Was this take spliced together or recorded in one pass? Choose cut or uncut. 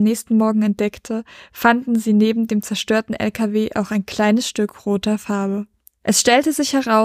uncut